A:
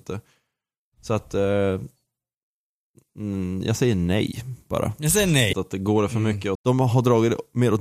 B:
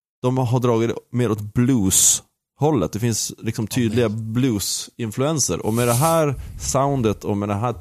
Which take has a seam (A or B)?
A